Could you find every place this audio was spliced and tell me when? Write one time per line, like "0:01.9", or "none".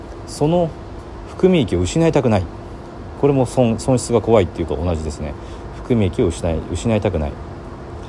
0:04.7